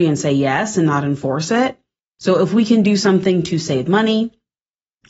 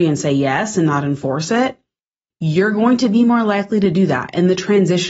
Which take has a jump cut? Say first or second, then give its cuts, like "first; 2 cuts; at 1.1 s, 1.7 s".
first; 1 cut; at 2.2 s